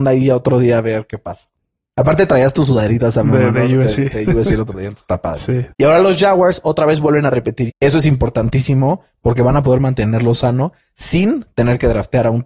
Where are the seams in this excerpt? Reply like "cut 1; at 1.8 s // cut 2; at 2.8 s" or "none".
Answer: cut 1; at 5.7 s // cut 2; at 7.7 s